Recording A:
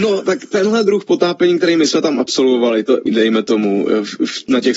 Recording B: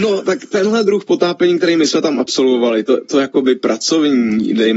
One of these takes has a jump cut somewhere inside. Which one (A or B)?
A